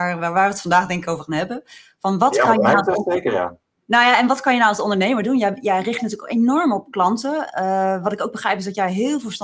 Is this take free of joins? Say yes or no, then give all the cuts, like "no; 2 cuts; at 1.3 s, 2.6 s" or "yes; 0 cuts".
yes; 0 cuts